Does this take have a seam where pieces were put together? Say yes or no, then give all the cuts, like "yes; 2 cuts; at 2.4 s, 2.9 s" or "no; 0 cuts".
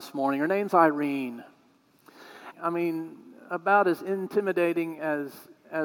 yes; 1 cut; at 2.5 s